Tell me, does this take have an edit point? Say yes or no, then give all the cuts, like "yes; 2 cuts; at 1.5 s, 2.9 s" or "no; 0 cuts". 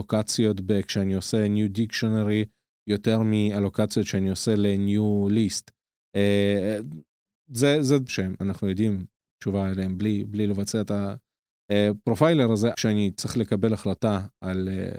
yes; 2 cuts; at 8.1 s, 12.7 s